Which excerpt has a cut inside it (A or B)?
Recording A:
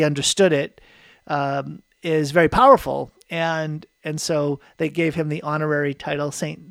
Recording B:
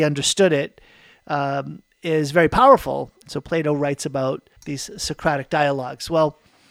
B